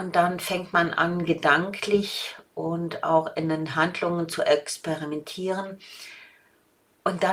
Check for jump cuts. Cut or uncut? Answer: uncut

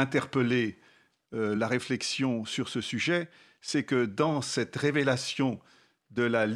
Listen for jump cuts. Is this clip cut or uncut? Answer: uncut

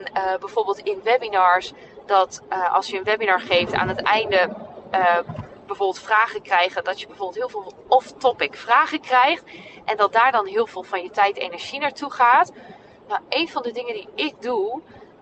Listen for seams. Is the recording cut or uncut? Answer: uncut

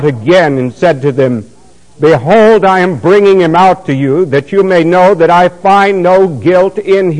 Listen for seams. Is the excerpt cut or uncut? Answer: uncut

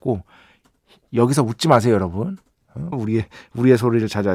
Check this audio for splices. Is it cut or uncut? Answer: cut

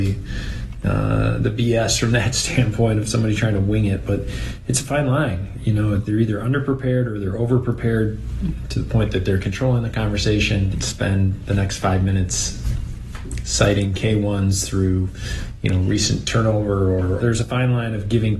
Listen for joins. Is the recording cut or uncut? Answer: cut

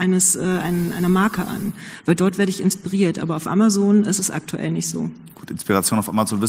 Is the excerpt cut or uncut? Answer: uncut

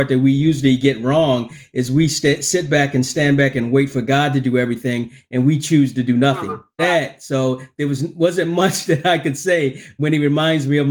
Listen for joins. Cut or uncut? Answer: cut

